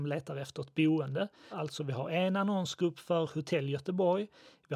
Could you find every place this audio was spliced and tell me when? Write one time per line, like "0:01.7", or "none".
0:01.5